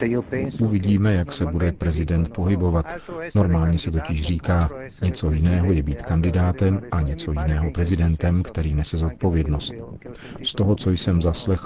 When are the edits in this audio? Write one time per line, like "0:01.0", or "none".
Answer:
none